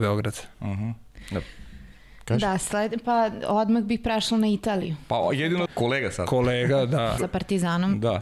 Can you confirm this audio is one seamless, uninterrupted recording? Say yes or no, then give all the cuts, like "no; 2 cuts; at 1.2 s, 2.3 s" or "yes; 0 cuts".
no; 2 cuts; at 5.7 s, 7.2 s